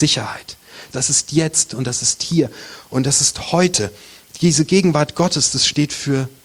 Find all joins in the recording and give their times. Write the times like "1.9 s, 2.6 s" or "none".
0.9 s